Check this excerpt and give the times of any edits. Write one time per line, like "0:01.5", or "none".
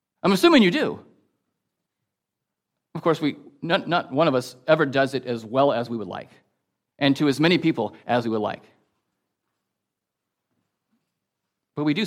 none